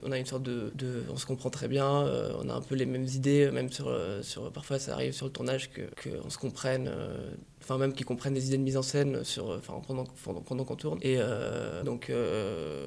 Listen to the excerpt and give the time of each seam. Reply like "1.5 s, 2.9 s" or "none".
11.8 s